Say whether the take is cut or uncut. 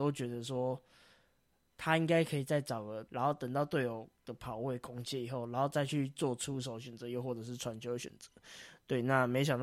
cut